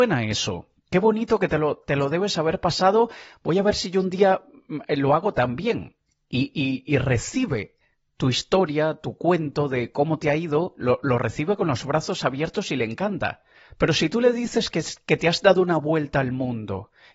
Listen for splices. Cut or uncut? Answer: uncut